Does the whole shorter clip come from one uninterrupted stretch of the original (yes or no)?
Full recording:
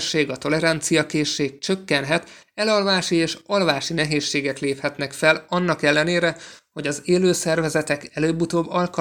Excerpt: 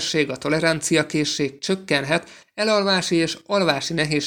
yes